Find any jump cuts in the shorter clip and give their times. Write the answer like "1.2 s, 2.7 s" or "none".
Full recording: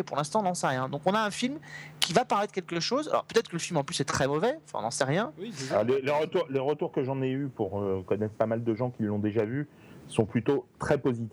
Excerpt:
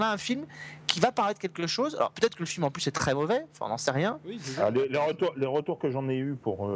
none